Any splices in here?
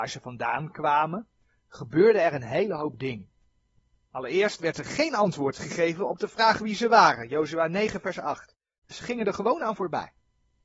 no; 0 cuts

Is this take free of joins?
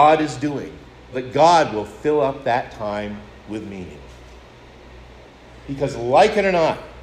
no; 2 cuts; at 1.1 s, 5.6 s

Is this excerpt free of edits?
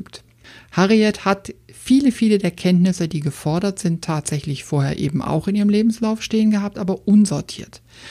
yes; 0 cuts

